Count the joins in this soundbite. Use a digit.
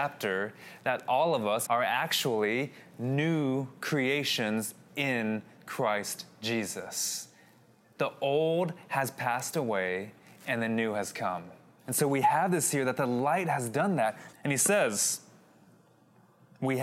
3